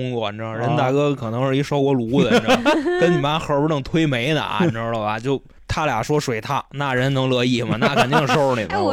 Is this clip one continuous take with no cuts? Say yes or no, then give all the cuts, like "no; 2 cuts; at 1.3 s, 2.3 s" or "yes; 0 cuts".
yes; 0 cuts